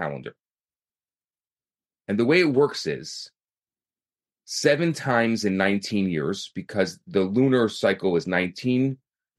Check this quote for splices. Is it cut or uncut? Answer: uncut